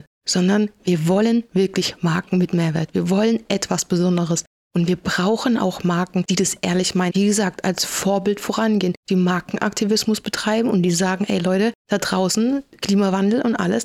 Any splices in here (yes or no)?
yes